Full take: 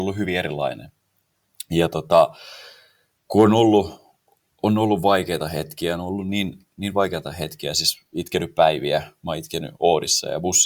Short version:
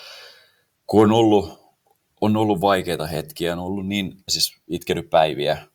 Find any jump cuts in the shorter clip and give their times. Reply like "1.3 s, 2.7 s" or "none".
4.3 s